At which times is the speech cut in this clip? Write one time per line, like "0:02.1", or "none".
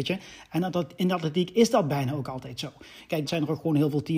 0:03.3